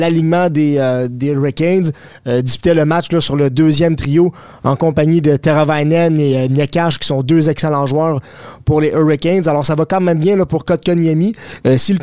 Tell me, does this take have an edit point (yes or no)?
no